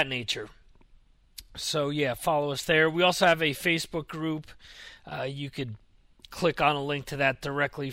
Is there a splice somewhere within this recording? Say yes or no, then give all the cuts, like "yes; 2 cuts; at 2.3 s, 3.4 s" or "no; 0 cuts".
no; 0 cuts